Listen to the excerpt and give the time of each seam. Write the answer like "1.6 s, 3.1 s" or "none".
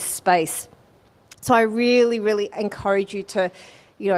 none